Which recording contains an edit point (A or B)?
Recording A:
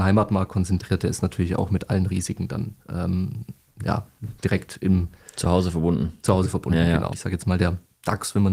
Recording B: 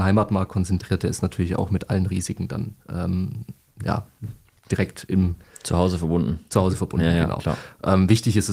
A